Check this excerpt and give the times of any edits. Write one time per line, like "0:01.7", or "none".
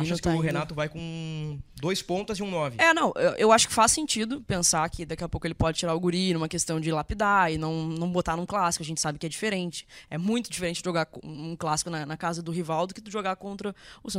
none